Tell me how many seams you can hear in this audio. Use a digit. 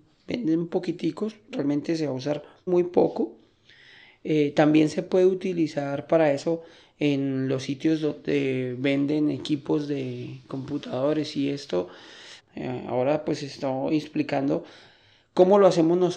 2